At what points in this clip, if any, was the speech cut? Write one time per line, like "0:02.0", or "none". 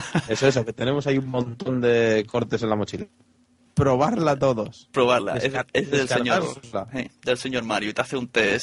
0:03.7